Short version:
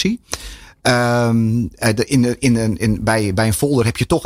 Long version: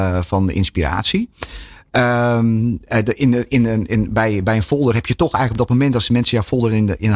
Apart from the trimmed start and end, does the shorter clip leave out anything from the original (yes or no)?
no